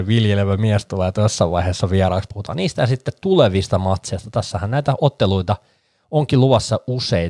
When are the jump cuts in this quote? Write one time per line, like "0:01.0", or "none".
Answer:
0:02.3